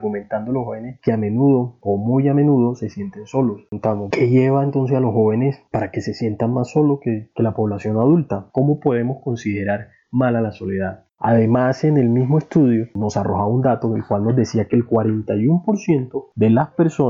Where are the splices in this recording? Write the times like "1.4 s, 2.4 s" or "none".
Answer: 4.1 s, 8.5 s, 11.1 s